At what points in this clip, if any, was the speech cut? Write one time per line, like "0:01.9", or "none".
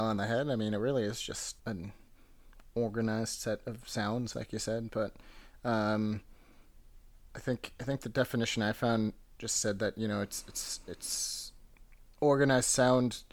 0:01.6
0:04.3